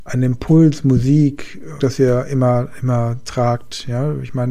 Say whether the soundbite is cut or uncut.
cut